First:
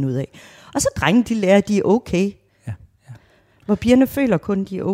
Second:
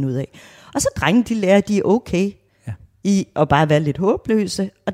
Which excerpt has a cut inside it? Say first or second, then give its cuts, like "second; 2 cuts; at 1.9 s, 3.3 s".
first; 1 cut; at 3.0 s